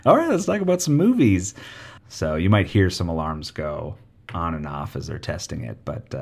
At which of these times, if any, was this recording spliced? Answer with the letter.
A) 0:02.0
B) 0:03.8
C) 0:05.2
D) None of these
A